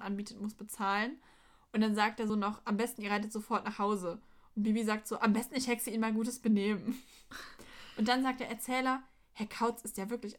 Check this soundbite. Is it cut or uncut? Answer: cut